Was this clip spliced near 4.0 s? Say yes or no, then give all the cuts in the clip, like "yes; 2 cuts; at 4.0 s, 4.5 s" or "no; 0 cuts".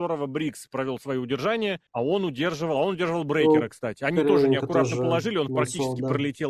no; 1 cut; at 1.9 s